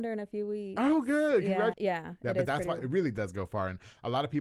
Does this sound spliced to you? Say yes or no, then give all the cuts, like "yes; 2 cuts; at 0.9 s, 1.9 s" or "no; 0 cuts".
yes; 2 cuts; at 1.7 s, 2.8 s